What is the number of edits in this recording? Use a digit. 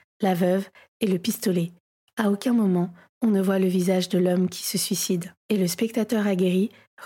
1